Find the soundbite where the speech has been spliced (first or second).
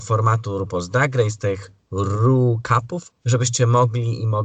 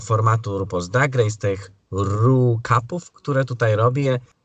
first